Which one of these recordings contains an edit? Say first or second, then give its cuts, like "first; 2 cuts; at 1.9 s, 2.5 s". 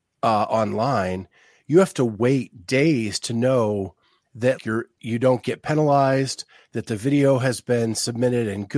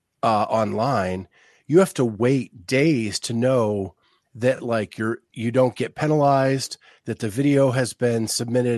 first; 1 cut; at 4.6 s